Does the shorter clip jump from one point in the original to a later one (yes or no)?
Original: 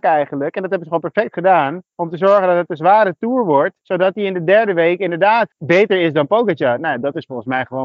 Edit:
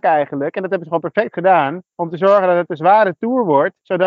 no